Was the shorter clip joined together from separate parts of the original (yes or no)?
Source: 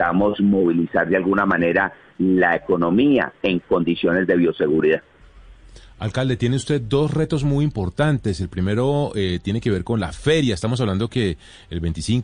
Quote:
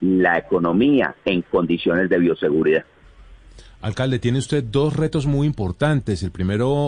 no